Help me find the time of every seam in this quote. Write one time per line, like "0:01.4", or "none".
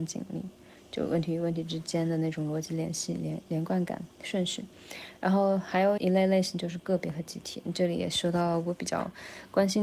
0:06.0